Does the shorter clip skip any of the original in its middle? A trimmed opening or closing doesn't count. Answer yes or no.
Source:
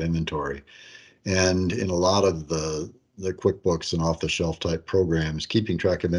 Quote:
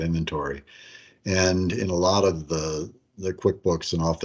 no